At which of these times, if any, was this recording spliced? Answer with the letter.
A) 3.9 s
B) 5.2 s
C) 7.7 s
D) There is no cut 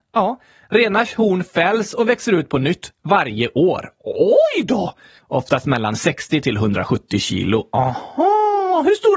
B